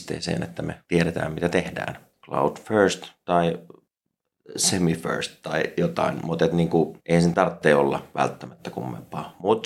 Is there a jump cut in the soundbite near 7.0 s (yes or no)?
yes